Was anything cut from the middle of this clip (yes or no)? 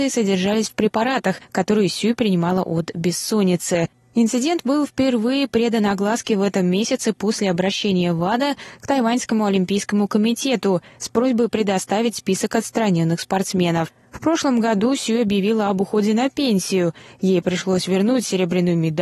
no